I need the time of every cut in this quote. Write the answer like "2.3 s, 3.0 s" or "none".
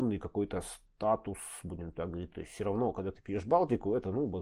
none